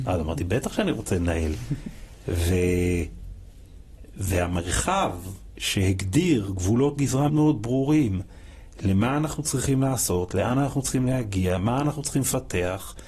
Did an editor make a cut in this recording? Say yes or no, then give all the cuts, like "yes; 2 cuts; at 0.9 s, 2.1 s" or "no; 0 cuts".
yes; 1 cut; at 7.3 s